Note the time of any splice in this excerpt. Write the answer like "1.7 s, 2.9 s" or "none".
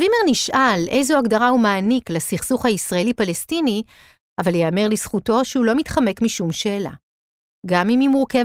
4.2 s